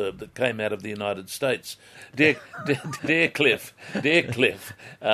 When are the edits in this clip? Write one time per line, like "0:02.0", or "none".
0:01.9
0:03.0